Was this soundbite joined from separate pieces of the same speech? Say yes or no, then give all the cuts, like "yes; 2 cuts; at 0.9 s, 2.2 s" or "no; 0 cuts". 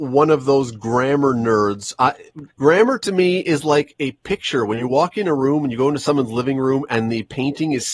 yes; 1 cut; at 2.5 s